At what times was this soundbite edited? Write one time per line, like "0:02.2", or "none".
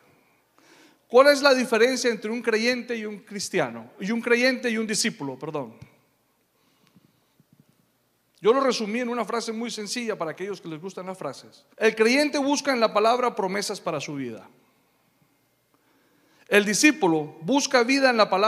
0:11.7